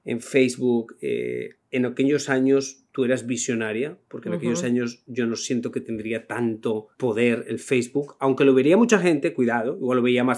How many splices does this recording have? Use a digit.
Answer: 1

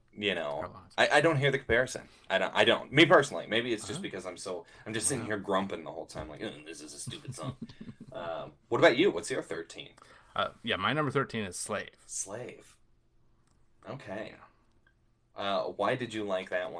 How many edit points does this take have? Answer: 0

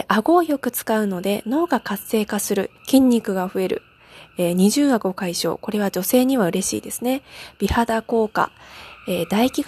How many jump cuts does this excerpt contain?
1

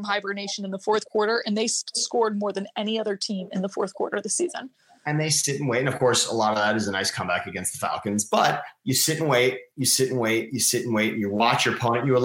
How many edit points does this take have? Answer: 0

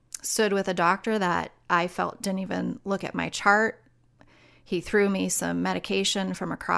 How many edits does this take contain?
0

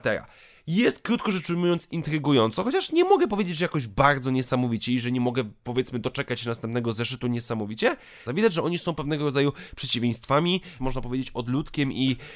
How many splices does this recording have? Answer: 2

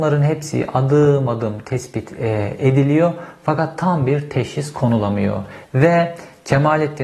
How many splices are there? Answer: 1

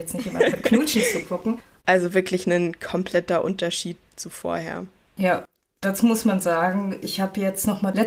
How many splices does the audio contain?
1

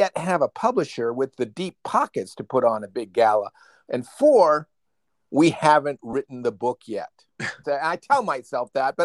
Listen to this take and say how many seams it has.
1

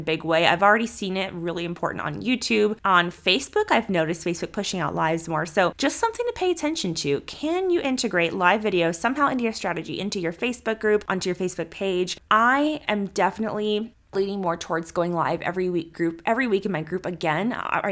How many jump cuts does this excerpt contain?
0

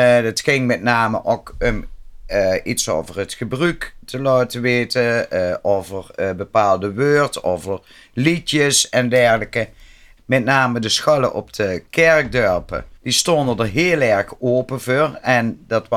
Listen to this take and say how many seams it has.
2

